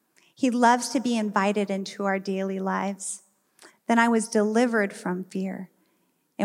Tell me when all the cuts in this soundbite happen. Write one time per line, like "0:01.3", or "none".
0:03.7

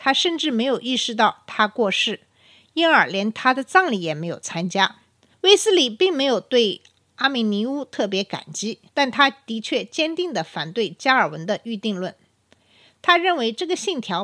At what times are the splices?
0:05.3
0:08.9

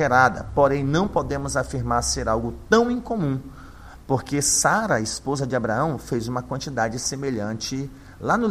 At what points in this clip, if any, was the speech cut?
none

